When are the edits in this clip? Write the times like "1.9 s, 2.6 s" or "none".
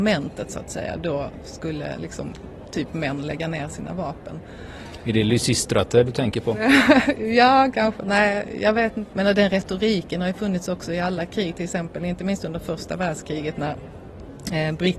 9.1 s

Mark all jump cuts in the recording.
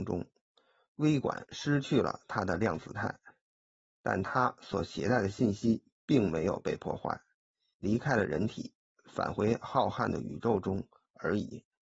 7.7 s

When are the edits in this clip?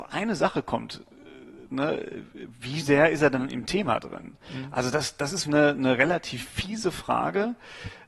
5.4 s

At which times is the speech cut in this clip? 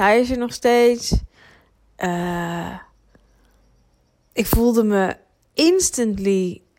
none

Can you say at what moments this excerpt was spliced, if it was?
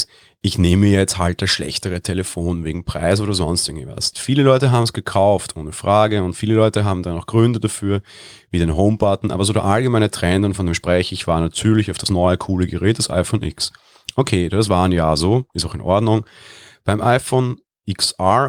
4.1 s

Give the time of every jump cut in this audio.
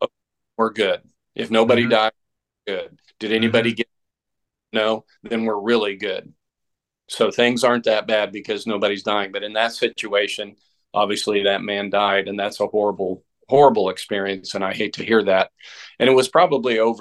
none

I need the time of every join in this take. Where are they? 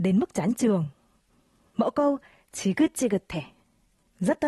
none

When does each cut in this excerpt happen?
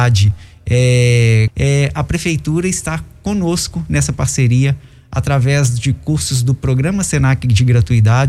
1.5 s

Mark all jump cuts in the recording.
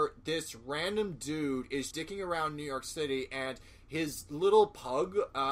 1.9 s

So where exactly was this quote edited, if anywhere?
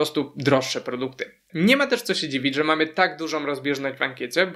1.5 s

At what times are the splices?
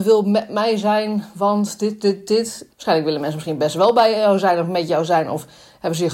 2.7 s

